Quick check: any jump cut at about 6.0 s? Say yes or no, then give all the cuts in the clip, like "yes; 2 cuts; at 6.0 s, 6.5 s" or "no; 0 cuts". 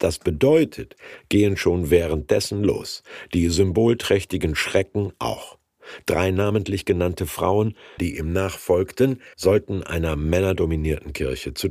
no; 2 cuts; at 8.0 s, 9.3 s